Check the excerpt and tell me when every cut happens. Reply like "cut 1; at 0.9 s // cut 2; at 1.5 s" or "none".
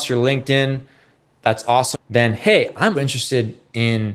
cut 1; at 1.9 s // cut 2; at 2.9 s

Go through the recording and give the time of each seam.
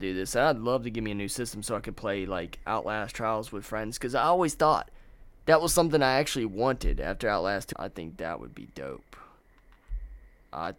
cut 1; at 7.7 s

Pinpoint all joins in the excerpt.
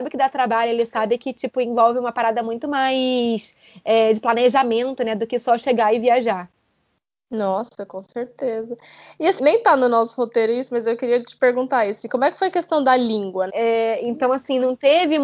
cut 1; at 9.4 s // cut 2; at 13.5 s

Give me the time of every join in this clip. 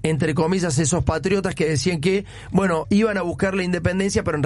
cut 1; at 2.8 s

